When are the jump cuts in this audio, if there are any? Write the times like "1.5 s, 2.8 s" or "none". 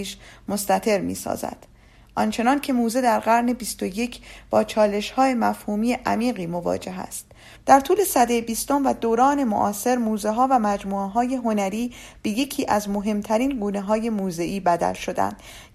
7.5 s